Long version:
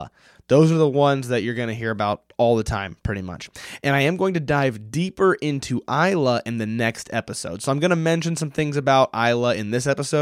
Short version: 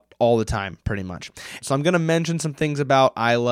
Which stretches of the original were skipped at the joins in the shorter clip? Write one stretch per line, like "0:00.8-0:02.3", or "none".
0:03.8-0:07.6